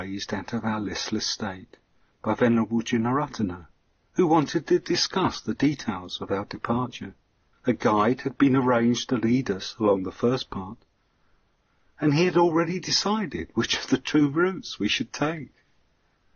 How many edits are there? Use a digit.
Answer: 1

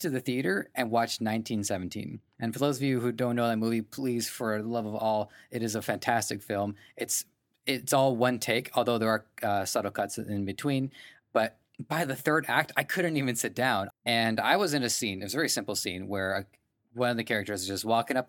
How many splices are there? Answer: 1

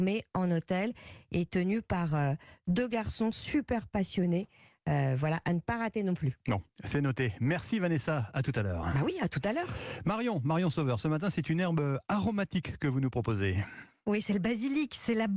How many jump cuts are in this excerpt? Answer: 0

